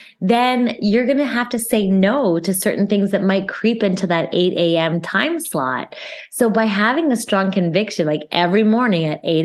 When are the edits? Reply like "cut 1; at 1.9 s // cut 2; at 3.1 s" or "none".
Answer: none